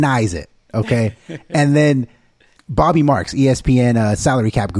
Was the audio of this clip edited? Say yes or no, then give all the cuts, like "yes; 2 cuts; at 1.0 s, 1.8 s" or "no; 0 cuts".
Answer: yes; 1 cut; at 2.6 s